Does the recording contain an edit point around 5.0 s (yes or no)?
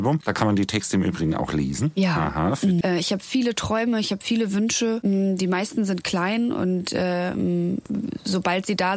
no